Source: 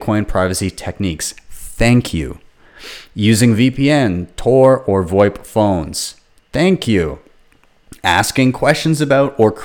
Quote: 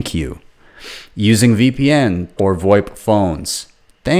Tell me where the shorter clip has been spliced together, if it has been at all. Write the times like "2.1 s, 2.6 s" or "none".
2.4 s